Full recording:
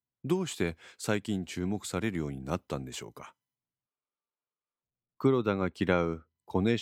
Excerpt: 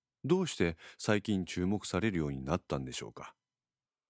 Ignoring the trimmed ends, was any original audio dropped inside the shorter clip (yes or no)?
no